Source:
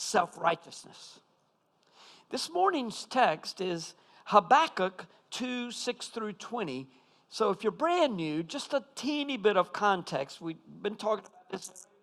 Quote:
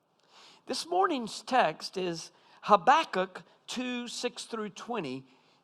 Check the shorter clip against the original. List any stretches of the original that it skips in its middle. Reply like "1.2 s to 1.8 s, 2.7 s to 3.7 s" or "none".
none